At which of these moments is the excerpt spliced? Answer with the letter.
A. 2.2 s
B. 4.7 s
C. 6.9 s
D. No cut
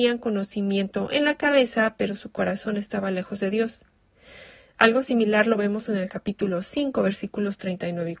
B